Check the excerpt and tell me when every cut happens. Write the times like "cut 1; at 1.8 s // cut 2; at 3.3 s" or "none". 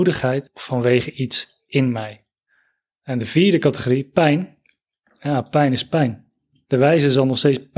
cut 1; at 6.6 s